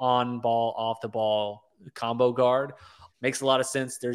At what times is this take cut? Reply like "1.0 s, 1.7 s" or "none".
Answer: 3.1 s